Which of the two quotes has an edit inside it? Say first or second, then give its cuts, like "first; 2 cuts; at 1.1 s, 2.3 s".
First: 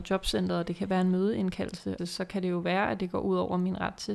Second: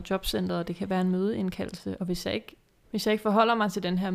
first; 1 cut; at 2.0 s